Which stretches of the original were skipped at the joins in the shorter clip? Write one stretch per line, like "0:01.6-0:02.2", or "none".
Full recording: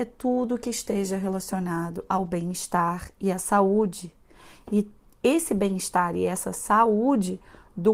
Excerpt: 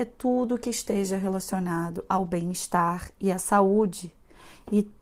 none